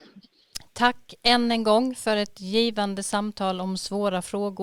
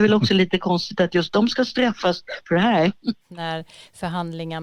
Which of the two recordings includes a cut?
second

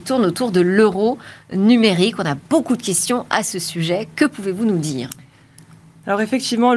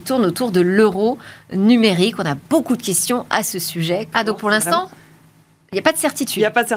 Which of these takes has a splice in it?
second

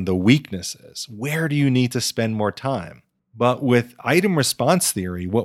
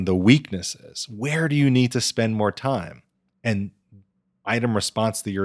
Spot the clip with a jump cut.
first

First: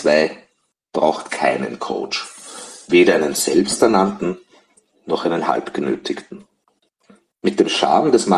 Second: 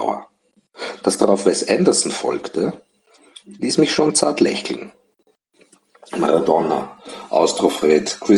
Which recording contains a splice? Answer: second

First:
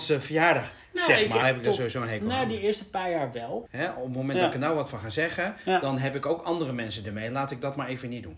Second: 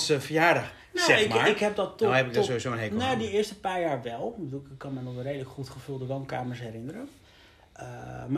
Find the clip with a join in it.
first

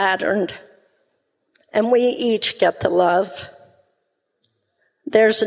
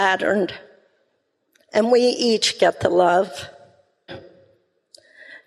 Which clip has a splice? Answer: second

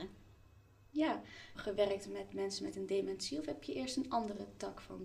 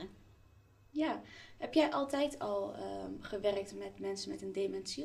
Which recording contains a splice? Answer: first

